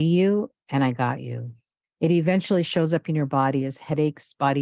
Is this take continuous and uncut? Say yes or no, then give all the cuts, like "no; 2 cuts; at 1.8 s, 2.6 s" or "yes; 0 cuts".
no; 1 cut; at 1.8 s